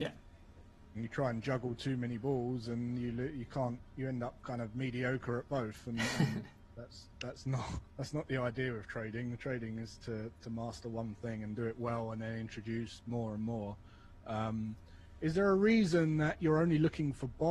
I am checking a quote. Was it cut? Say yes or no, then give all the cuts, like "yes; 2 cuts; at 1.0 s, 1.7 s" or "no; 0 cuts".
yes; 1 cut; at 0.9 s